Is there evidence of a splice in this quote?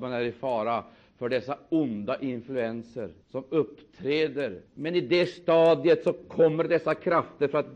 yes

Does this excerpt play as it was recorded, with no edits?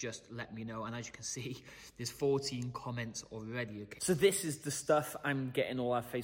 no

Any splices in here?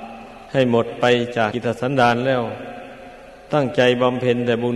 yes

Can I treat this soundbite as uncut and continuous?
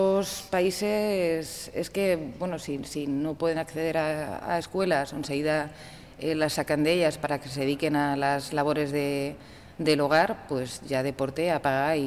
yes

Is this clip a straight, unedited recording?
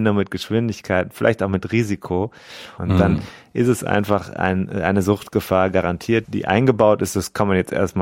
no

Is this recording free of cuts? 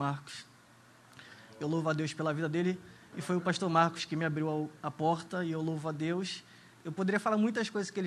no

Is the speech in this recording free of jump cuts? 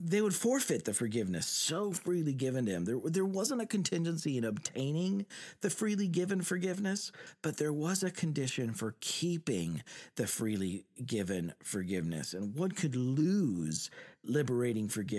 yes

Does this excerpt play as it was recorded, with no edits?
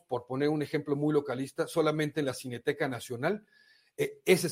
yes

